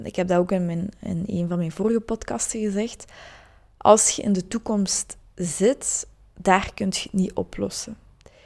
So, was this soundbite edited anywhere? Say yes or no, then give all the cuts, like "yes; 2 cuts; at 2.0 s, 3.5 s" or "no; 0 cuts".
no; 0 cuts